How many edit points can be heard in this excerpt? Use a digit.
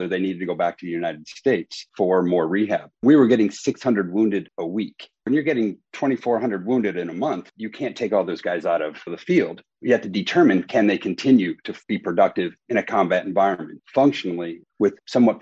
0